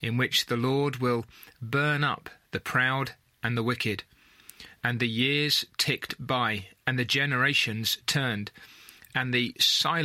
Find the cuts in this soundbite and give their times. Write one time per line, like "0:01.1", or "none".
0:04.8